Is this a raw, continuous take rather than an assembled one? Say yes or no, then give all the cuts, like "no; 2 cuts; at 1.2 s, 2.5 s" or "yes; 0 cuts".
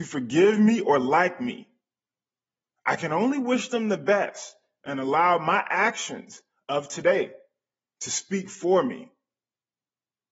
yes; 0 cuts